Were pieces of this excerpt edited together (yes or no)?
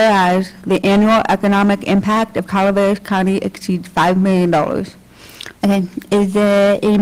yes